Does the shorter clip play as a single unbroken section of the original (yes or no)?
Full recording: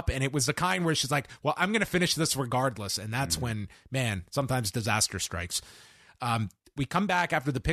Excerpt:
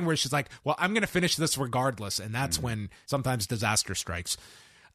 no